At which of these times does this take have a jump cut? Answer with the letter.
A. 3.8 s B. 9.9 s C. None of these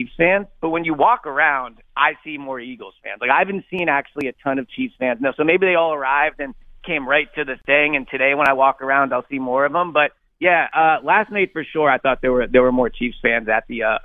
C